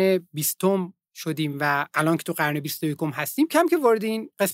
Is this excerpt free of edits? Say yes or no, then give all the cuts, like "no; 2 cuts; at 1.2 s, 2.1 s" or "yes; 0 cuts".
no; 1 cut; at 3.5 s